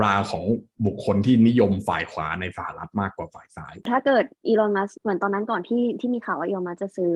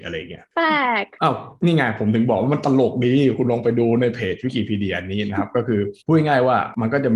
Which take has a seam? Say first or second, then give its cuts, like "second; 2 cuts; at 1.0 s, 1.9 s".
second; 1 cut; at 6.0 s